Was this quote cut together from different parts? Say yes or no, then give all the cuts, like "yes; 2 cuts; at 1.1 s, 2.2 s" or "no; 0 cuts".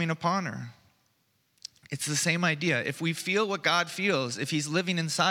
no; 0 cuts